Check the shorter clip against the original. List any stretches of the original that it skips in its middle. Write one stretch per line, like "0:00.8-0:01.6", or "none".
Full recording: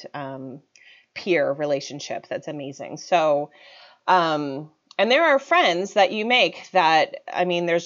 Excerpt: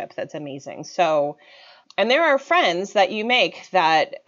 0:04.0-0:04.8